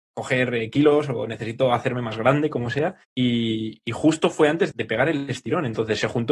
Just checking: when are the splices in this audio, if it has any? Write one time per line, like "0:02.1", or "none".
0:03.0
0:04.7